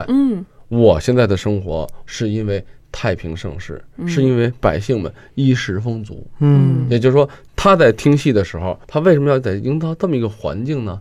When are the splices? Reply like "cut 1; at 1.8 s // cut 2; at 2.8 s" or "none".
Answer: cut 1; at 2.1 s

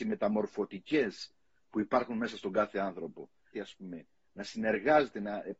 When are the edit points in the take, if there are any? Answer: cut 1; at 3.5 s

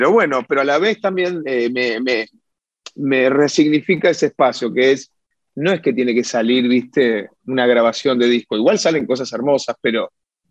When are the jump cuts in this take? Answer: none

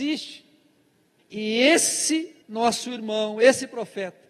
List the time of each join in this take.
cut 1; at 1.2 s // cut 2; at 2.4 s

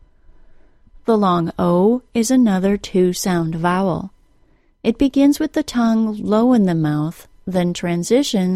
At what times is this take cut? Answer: none

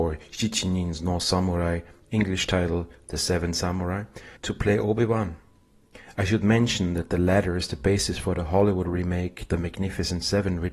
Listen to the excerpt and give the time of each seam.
cut 1; at 4.4 s

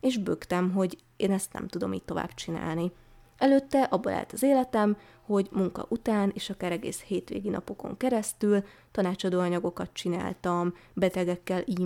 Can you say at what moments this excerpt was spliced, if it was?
none

